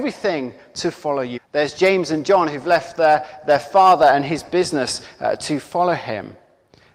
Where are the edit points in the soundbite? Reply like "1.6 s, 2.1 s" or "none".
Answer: 1.4 s

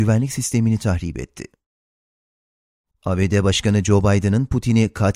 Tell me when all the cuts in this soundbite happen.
2.9 s

